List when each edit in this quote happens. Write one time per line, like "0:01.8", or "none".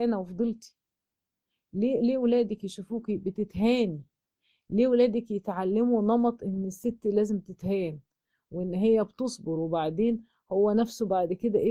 none